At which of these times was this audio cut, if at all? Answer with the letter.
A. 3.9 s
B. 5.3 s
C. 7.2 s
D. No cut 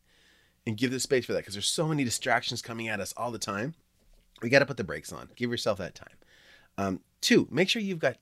B